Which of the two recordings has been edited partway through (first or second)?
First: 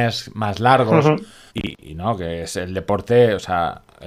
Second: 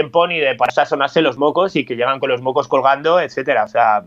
first